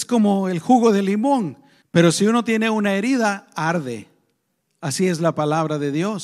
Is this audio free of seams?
no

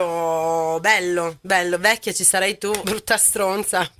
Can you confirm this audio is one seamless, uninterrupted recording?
no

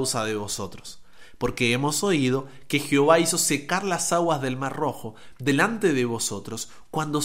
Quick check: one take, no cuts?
yes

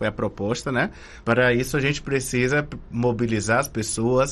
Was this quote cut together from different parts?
yes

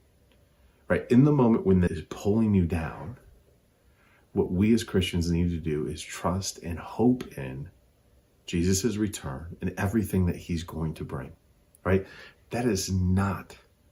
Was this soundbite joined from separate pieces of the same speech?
yes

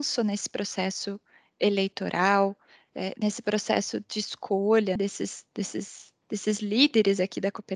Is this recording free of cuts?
no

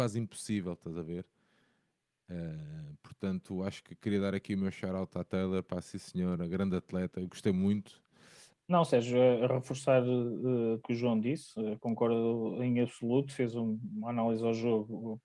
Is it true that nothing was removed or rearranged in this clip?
no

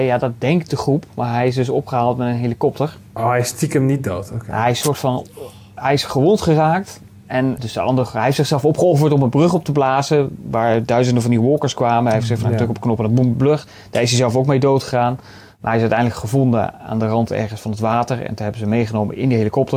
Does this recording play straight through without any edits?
no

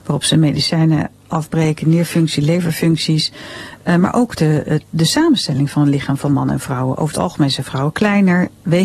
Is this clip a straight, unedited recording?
yes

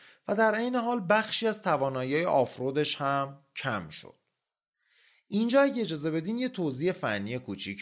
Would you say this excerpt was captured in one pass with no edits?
yes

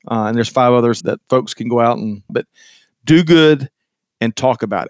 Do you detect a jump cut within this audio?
yes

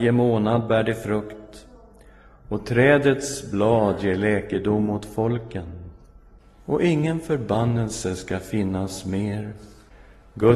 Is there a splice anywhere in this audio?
no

